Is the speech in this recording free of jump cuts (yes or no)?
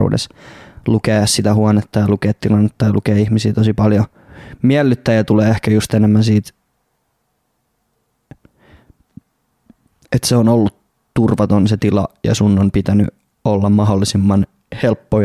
yes